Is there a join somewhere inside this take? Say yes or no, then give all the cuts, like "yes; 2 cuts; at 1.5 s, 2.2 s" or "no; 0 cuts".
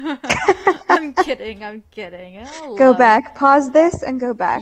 no; 0 cuts